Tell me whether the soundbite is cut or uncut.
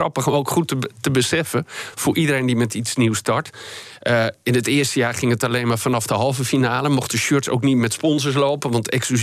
uncut